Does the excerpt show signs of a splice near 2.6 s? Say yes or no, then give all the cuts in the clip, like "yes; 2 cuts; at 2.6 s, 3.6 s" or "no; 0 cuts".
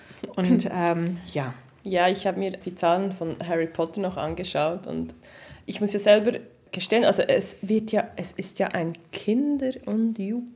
yes; 1 cut; at 2.6 s